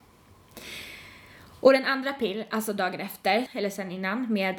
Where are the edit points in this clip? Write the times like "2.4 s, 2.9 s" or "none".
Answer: 3.5 s